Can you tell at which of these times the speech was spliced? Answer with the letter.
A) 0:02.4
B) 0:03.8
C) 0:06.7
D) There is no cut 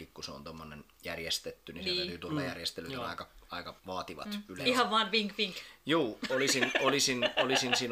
B